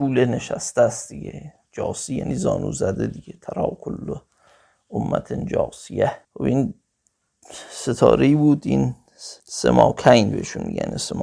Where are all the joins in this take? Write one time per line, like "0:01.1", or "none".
0:06.2
0:09.4